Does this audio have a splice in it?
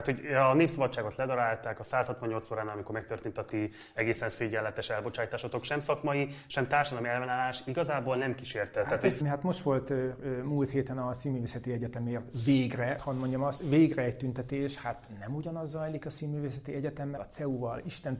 yes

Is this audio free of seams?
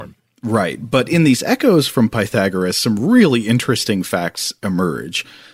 yes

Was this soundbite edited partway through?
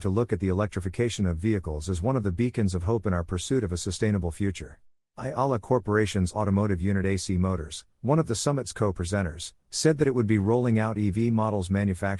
yes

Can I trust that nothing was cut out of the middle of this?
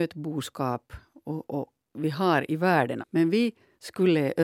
no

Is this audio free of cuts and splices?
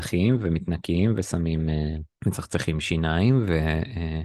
no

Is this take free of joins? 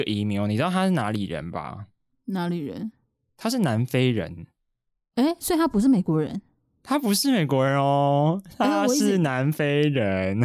yes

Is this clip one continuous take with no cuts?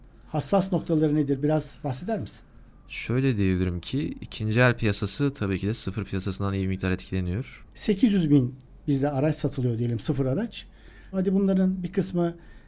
no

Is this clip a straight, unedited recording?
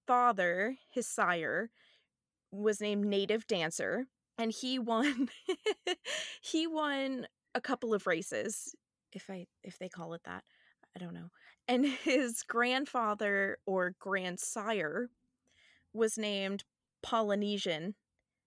no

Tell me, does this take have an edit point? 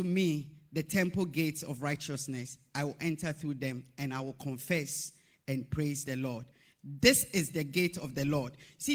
no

